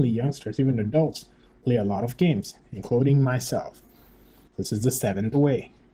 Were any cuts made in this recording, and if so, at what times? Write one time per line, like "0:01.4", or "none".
0:04.5

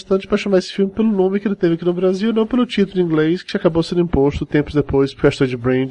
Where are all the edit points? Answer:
none

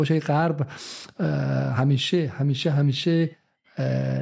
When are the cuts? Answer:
none

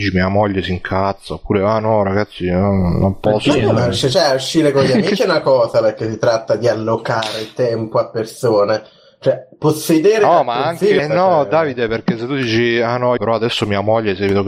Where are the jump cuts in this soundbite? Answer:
0:11.0
0:13.2

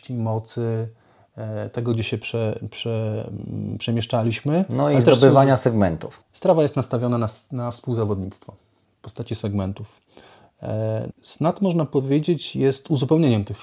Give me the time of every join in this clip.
0:11.1

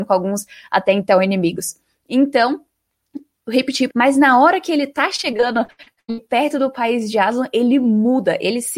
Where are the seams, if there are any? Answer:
0:03.9

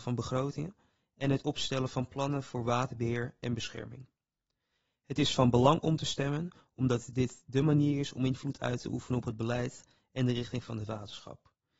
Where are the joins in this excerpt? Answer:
none

